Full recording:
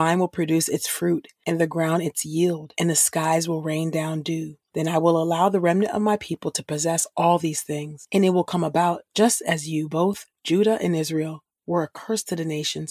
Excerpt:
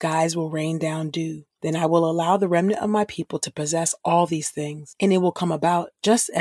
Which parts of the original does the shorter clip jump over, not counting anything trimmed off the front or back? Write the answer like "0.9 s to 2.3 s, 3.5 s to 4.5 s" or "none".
none